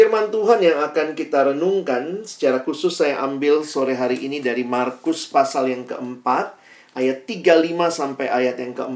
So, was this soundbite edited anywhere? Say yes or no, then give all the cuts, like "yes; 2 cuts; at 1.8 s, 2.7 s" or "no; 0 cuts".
no; 0 cuts